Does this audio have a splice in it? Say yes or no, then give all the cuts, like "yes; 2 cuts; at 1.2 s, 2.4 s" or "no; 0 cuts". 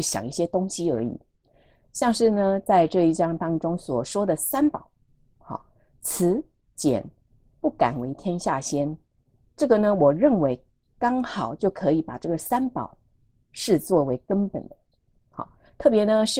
no; 0 cuts